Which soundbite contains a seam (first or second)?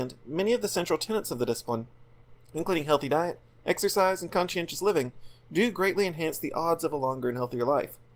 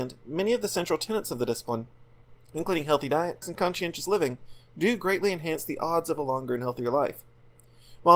second